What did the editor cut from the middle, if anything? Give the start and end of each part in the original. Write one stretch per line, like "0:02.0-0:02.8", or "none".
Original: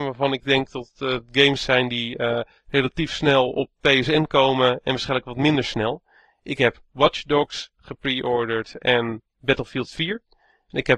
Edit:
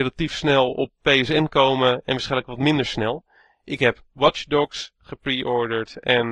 none